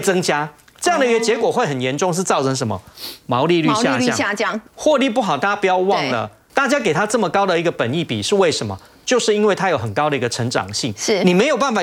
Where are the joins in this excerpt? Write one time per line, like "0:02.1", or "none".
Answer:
0:04.7
0:06.5